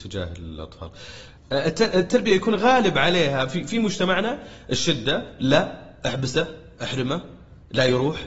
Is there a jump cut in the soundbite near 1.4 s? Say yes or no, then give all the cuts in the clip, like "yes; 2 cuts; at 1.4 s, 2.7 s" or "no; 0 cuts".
yes; 1 cut; at 1.4 s